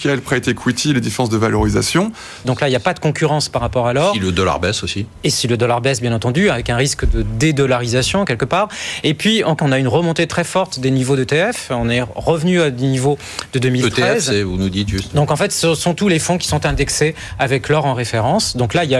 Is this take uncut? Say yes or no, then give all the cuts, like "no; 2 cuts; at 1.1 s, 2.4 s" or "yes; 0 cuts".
no; 2 cuts; at 2.4 s, 9.6 s